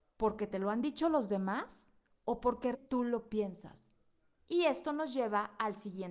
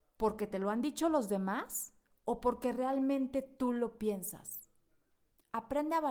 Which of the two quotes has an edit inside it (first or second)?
first